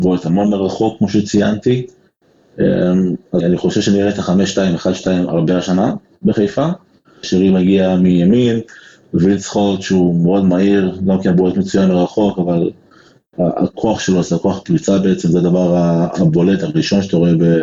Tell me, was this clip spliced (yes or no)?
yes